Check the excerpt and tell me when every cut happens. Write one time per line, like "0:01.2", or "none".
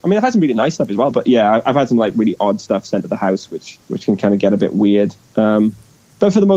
0:01.1
0:03.8